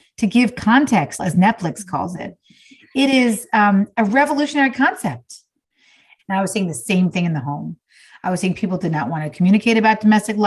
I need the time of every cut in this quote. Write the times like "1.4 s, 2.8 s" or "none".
1.2 s, 6.2 s